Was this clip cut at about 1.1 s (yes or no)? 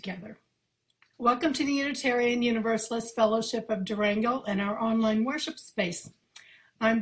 yes